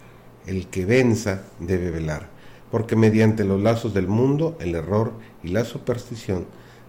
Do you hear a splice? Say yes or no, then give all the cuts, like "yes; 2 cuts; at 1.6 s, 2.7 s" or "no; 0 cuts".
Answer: no; 0 cuts